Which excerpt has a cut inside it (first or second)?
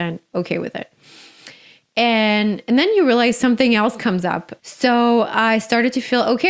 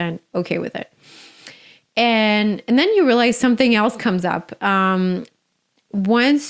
first